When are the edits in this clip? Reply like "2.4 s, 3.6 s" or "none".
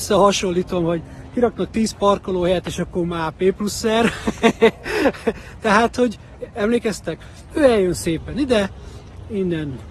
7.5 s